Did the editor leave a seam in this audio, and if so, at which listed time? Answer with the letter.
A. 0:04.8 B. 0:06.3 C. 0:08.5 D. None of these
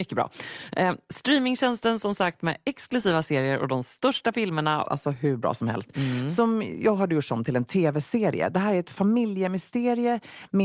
A